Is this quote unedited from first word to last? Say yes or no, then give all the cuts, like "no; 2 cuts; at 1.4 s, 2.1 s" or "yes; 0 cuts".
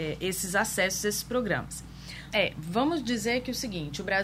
no; 1 cut; at 2.3 s